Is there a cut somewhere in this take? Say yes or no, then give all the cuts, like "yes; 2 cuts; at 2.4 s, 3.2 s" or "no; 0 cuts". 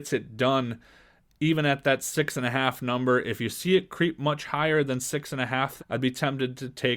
yes; 1 cut; at 5.8 s